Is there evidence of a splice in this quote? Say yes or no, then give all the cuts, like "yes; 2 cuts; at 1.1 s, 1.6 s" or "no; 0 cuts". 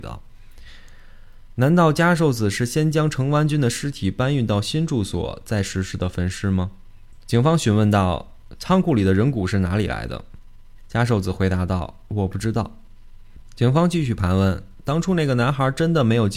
yes; 1 cut; at 7.2 s